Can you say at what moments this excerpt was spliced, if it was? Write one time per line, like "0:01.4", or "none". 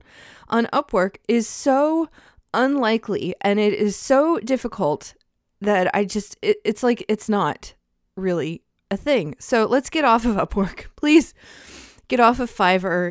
none